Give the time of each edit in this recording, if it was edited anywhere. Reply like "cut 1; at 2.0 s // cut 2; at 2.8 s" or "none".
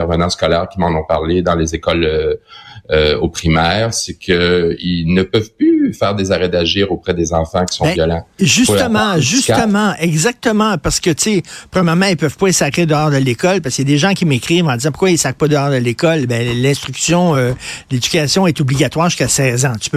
none